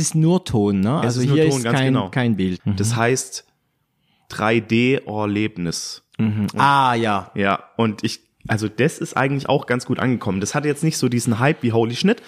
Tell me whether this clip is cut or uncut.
cut